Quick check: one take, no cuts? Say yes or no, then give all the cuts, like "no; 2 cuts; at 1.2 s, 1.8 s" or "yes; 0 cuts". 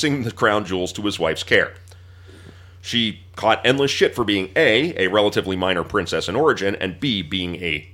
yes; 0 cuts